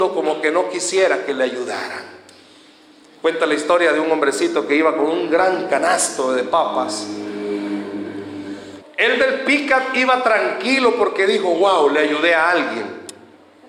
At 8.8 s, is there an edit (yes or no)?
yes